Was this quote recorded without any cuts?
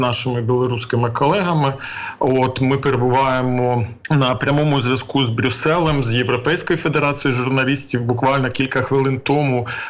yes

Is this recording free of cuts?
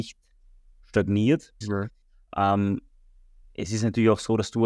no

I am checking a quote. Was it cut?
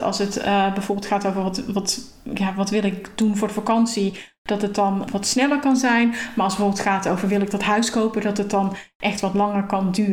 no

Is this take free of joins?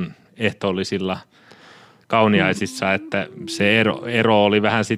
yes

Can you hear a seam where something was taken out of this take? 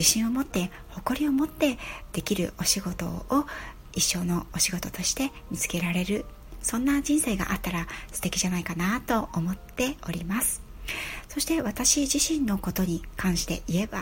no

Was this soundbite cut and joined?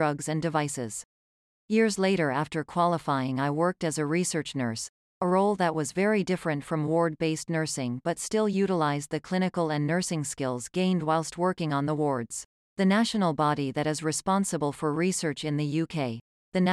yes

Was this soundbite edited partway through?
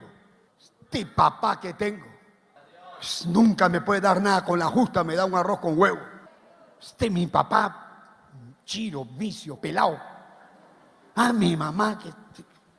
yes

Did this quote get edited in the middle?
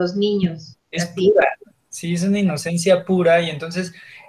no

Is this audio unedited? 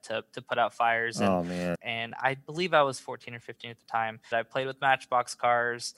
no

